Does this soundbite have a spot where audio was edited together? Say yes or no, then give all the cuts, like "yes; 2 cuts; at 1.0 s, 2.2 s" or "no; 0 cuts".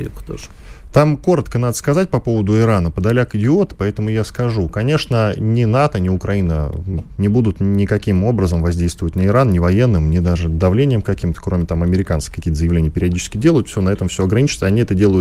yes; 1 cut; at 7.2 s